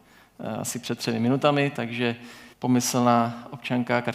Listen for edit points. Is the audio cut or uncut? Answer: cut